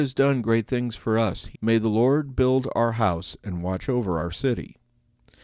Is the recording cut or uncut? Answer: cut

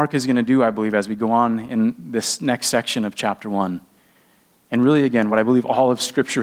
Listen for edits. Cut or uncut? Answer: uncut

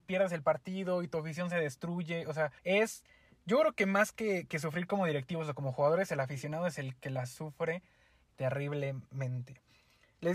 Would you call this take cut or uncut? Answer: cut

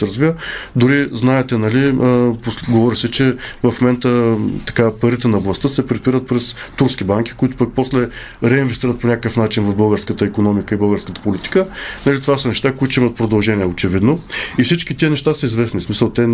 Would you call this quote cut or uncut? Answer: uncut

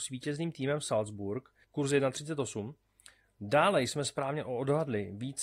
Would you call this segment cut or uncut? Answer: cut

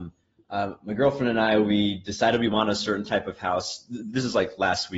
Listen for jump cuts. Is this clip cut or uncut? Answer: uncut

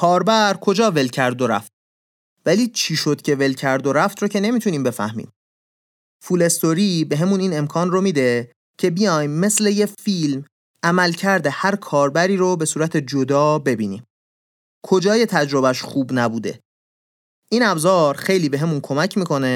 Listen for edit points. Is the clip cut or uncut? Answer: cut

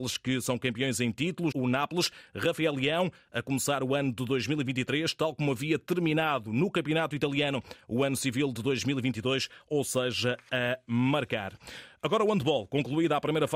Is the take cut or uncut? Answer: cut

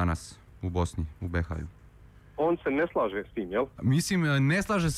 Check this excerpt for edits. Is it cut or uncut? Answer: cut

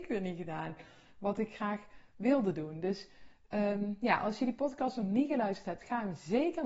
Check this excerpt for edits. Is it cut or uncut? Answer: uncut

